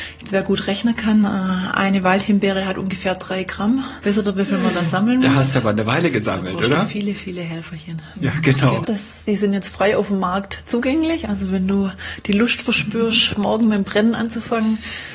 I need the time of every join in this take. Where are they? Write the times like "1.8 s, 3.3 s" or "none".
8.8 s